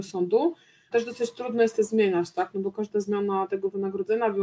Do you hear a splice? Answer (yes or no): yes